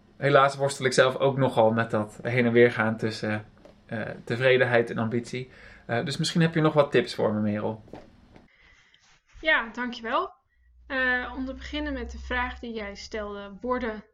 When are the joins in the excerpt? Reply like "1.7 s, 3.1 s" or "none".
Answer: none